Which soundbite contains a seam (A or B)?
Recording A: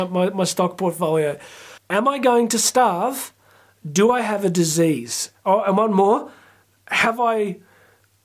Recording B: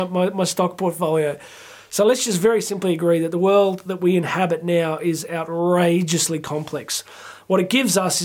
A